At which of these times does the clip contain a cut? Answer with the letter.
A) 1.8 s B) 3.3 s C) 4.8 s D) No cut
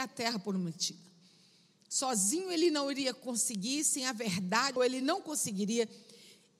C